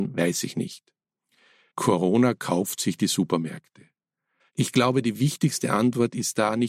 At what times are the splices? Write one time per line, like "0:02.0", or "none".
0:01.7
0:04.4